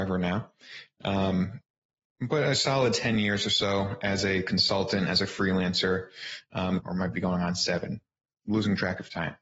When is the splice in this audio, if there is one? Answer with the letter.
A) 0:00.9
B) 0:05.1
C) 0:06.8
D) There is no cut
C